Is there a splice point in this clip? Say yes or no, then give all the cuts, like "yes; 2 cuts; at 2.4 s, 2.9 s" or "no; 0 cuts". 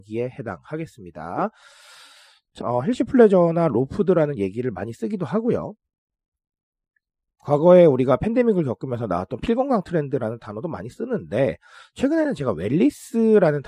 yes; 1 cut; at 2.6 s